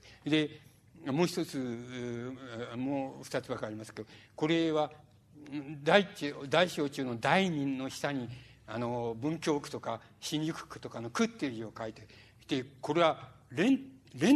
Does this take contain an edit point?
no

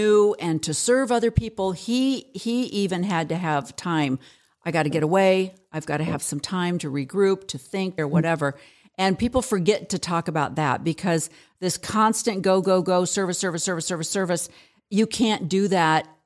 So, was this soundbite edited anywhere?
yes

